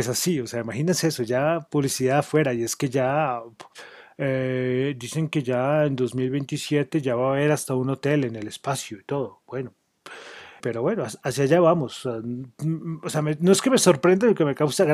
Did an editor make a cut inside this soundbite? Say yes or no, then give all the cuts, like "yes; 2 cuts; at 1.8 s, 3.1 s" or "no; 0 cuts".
yes; 1 cut; at 10.6 s